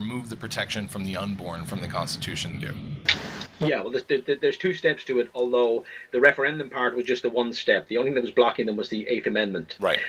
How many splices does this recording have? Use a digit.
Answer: 1